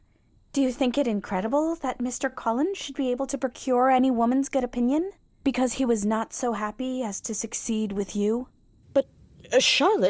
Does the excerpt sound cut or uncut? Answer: uncut